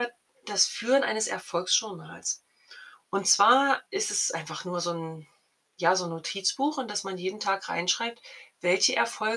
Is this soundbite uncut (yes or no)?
no